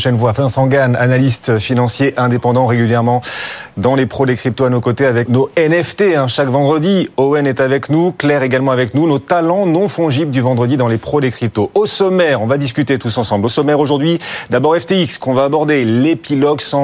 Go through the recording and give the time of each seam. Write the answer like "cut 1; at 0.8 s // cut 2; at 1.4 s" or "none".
cut 1; at 5.3 s